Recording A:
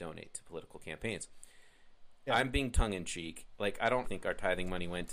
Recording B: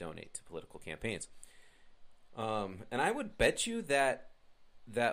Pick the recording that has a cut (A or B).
A